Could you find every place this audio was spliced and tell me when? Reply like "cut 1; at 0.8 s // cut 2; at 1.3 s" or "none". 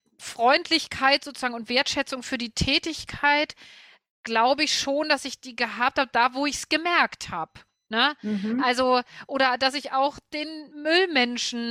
none